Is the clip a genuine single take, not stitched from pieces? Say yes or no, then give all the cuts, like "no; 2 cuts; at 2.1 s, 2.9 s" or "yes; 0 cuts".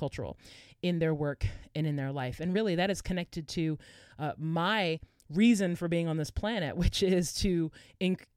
yes; 0 cuts